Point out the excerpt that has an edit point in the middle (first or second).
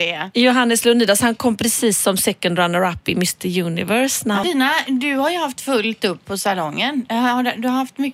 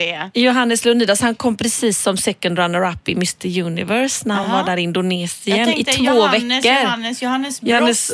first